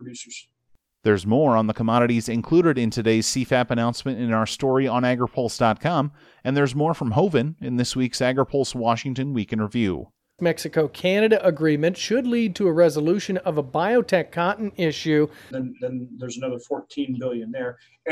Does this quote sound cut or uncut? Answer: cut